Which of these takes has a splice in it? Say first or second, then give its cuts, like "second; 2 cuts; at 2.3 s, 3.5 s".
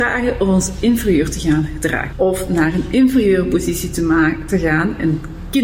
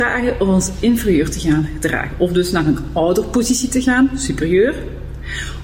first; 1 cut; at 2.1 s